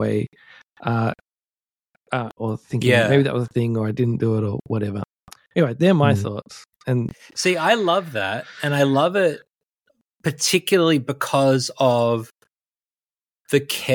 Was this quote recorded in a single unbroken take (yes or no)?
no